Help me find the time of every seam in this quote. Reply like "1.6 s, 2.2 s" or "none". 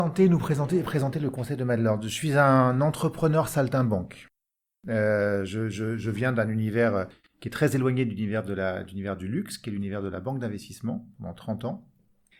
none

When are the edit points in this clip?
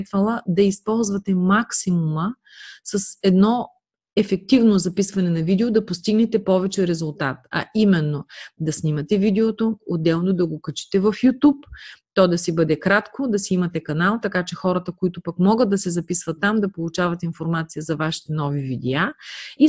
9.8 s

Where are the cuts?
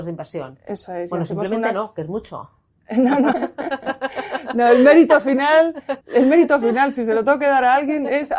3.3 s, 6.0 s

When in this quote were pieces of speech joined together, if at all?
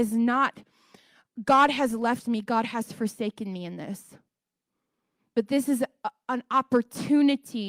none

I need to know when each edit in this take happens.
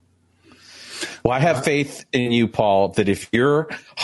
none

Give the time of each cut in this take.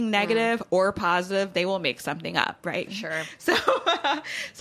2.9 s

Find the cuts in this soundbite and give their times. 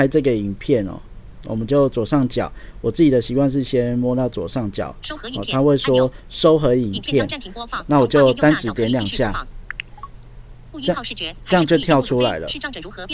none

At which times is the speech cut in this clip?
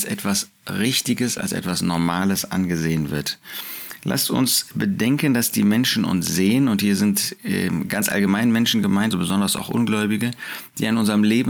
1.4 s, 9.1 s

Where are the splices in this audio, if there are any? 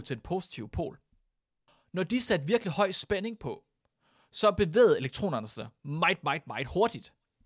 none

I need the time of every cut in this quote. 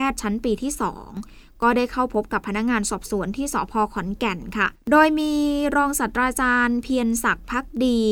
4.8 s

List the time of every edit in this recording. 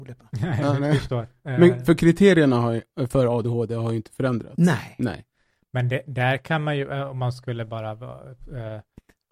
none

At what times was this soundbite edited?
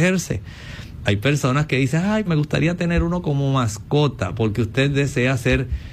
1.0 s, 2.3 s

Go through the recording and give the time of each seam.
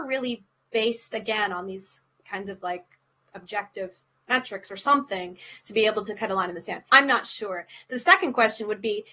6.9 s

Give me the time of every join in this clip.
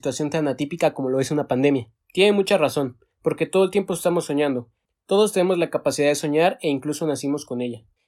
2.0 s

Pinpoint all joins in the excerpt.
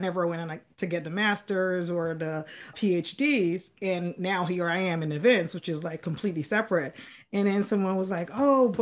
2.7 s

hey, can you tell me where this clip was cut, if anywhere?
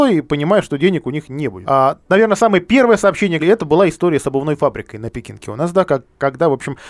1.6 s, 3.4 s

